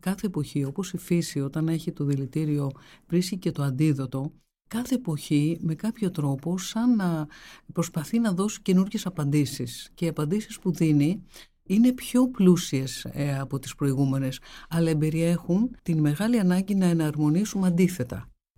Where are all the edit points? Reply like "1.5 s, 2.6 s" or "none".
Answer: 15.8 s